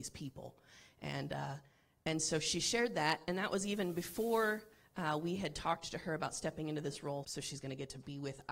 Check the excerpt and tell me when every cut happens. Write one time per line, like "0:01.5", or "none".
0:07.2